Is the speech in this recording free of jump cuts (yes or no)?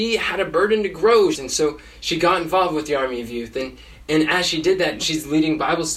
no